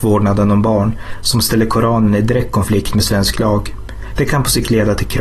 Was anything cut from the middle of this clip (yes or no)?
no